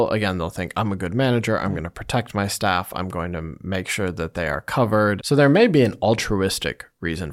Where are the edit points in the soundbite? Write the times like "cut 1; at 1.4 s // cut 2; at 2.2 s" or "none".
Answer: cut 1; at 5.2 s